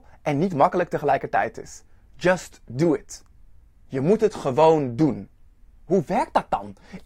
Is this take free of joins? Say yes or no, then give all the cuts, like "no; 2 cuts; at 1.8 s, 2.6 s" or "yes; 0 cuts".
yes; 0 cuts